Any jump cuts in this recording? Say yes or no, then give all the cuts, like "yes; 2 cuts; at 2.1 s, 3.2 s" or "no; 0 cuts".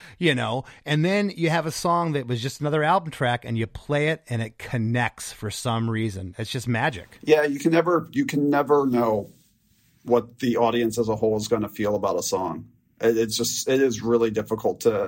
no; 0 cuts